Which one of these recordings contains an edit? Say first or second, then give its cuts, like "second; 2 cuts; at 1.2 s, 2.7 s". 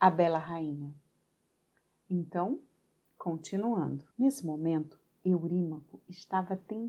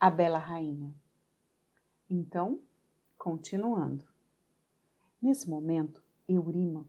first; 1 cut; at 4.1 s